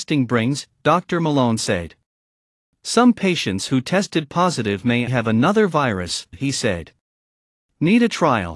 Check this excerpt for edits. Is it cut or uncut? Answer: cut